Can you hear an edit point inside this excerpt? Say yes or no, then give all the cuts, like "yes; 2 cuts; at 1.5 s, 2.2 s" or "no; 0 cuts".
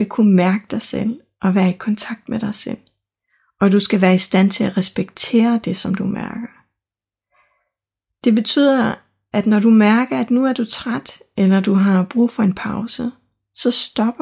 no; 0 cuts